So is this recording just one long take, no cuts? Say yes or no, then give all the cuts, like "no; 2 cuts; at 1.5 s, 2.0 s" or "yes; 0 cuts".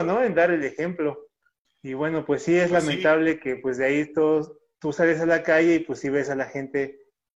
yes; 0 cuts